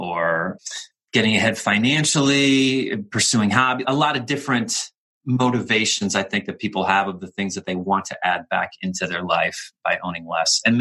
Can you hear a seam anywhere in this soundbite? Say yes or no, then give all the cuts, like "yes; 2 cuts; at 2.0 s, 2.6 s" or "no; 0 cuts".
yes; 1 cut; at 3.8 s